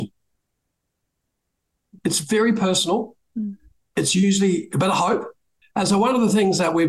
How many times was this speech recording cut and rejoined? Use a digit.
1